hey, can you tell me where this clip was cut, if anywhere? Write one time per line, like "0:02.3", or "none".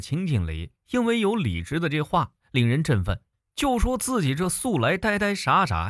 0:02.4